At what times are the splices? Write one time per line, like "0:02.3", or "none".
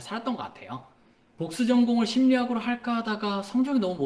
0:01.3

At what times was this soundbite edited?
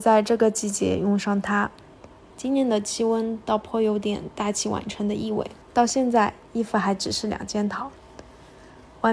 0:02.3
0:05.6

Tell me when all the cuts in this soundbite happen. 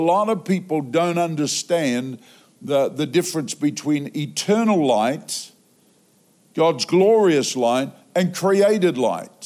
none

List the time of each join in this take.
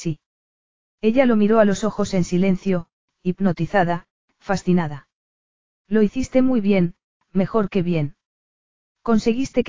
none

